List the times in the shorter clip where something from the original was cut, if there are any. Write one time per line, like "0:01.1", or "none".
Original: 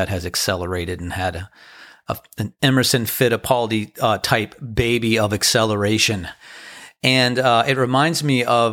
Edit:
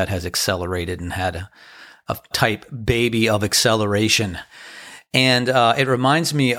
0:02.3